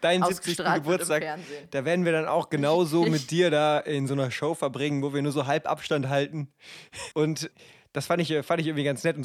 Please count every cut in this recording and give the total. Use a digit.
1